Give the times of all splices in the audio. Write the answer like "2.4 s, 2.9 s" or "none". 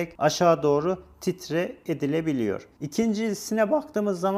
2.7 s